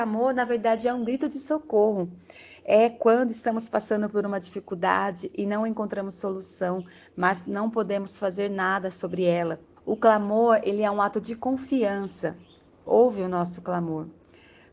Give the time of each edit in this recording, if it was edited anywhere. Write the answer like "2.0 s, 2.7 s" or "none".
9.8 s, 12.9 s